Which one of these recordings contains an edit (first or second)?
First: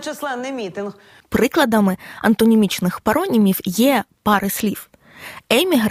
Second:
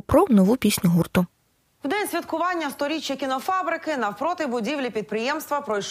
first